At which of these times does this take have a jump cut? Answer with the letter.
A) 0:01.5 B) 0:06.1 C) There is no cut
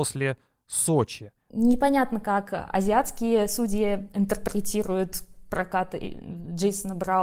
A